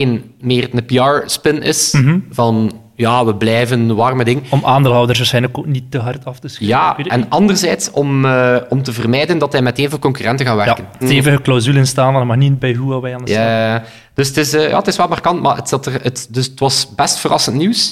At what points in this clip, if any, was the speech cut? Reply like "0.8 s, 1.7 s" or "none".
11.0 s